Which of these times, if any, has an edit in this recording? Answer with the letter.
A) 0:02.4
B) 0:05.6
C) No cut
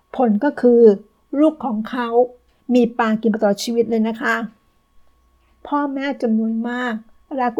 C